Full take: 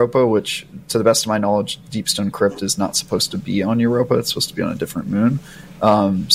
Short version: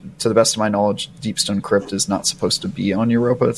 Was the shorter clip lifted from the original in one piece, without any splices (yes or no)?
yes